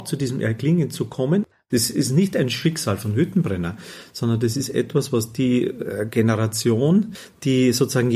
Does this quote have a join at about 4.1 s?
no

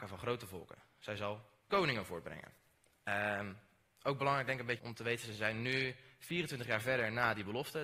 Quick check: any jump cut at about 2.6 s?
no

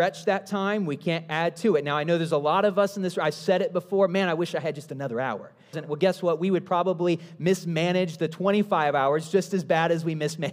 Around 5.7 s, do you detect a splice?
yes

